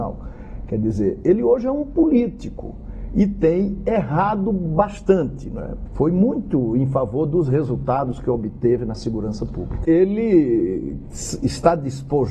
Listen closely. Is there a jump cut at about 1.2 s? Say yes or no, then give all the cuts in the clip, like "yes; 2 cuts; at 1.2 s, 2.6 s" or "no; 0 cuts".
no; 2 cuts; at 5.9 s, 9.8 s